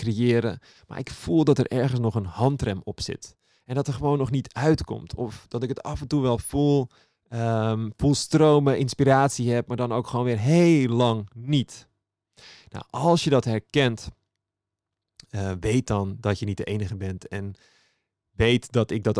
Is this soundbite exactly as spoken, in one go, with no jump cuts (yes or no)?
yes